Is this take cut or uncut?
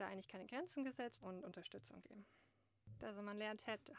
cut